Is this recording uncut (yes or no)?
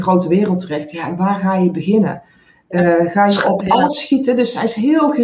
yes